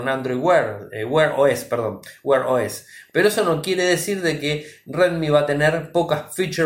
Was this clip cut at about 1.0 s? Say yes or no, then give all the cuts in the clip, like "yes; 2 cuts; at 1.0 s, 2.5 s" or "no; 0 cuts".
no; 1 cut; at 3.1 s